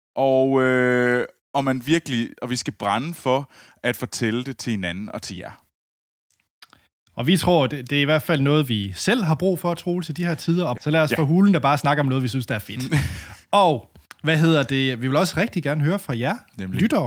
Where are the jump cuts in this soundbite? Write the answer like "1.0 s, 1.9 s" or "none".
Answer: 10.8 s